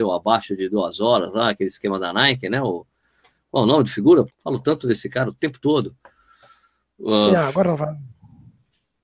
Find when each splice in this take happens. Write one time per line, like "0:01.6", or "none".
0:04.3

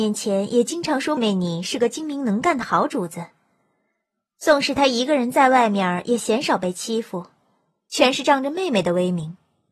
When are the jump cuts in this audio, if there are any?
0:01.2

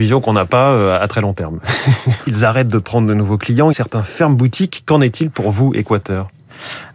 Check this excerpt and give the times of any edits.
0:02.3
0:03.7

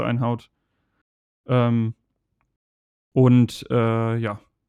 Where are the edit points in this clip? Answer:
none

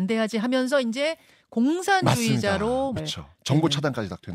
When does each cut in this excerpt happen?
0:03.0

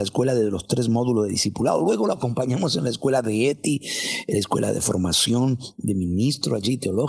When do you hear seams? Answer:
none

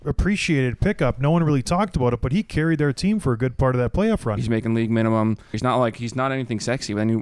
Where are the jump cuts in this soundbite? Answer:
0:04.4
0:05.5

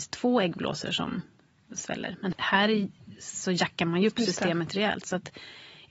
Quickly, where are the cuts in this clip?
0:02.3

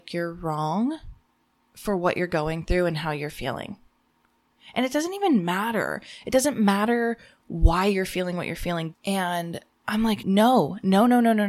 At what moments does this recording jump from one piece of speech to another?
0:08.9
0:10.2

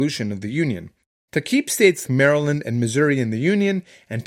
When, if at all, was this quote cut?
0:02.0

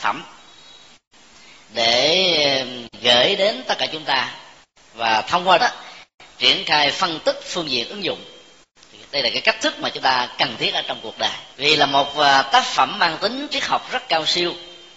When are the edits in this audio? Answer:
0:05.6
0:11.5

